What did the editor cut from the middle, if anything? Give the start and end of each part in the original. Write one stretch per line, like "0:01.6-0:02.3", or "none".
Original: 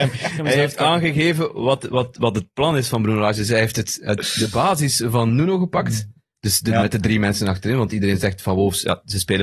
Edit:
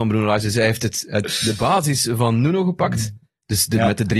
none